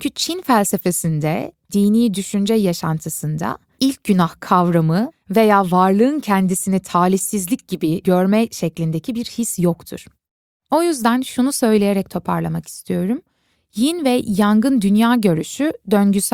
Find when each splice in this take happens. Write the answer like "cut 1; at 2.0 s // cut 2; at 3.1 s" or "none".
none